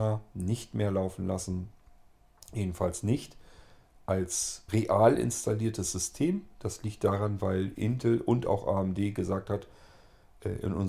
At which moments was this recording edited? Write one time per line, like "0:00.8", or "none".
0:04.7